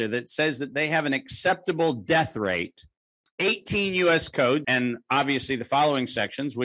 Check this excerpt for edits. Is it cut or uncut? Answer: cut